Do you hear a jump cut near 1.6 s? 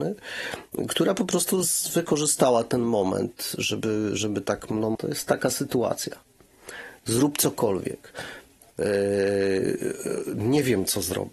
yes; 2 cuts; at 1.6 s, 4.9 s

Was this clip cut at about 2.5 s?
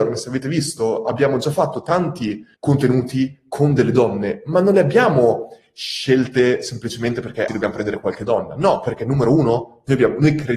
yes; 2 cuts; at 2.5 s, 7.5 s

